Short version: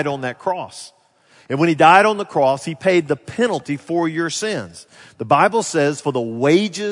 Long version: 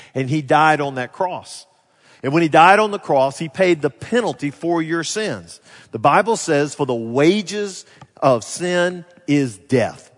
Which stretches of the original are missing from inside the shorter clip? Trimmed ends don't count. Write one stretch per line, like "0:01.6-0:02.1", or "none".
none